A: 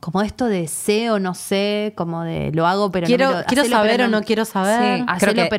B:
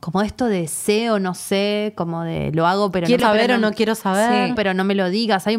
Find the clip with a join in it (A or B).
B